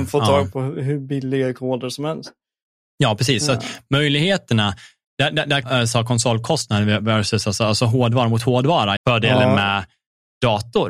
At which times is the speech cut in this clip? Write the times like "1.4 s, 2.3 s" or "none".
5.6 s, 9.0 s